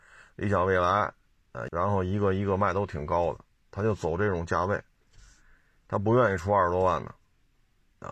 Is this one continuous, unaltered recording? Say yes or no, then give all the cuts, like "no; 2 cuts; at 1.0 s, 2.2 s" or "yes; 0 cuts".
no; 1 cut; at 1.7 s